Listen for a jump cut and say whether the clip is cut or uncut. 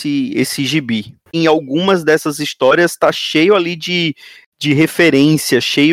cut